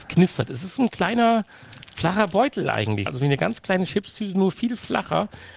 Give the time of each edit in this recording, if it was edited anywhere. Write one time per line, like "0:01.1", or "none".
0:03.1